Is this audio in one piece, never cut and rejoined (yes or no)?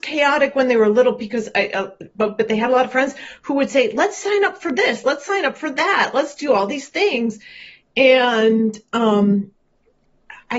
yes